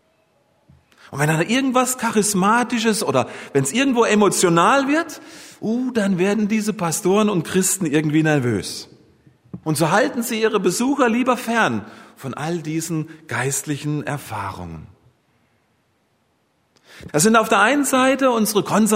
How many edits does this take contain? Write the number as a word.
two